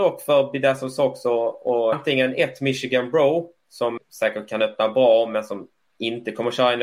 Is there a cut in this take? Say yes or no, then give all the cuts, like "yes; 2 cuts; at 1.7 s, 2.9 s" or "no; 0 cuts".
yes; 2 cuts; at 1.9 s, 4.0 s